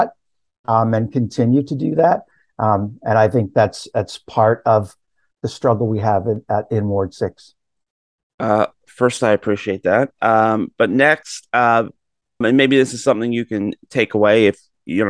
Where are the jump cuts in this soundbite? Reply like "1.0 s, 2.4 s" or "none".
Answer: 12.4 s